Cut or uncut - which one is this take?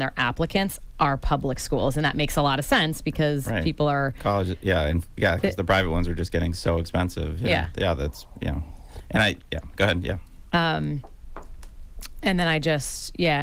uncut